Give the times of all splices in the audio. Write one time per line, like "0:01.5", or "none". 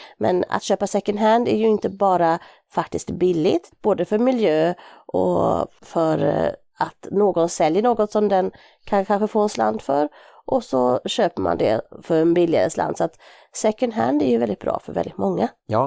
0:03.7